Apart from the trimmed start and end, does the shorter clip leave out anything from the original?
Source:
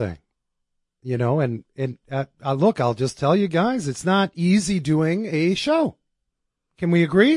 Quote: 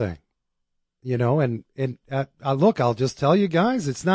no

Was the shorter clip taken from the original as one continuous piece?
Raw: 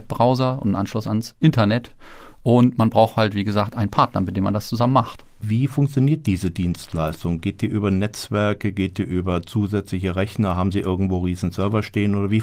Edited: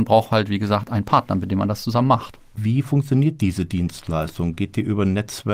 yes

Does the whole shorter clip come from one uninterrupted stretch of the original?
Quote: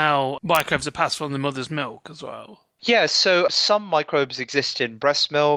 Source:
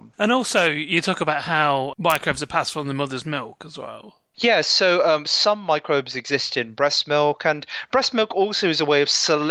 no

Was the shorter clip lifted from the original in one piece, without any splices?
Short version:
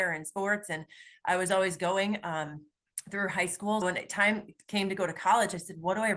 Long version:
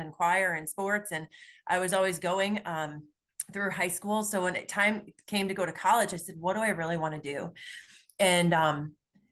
no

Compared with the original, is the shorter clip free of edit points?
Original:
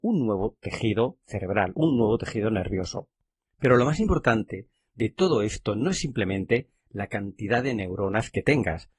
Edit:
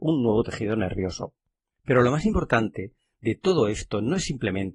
yes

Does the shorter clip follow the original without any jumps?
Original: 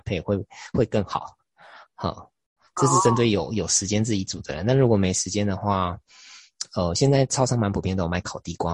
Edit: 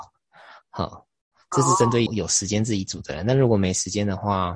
no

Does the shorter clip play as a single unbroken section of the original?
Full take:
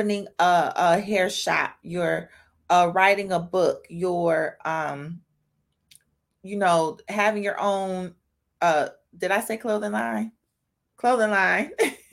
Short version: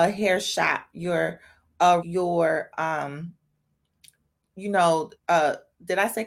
no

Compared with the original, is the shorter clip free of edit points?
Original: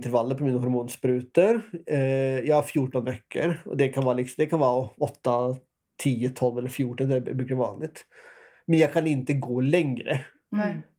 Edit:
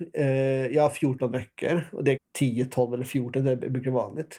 no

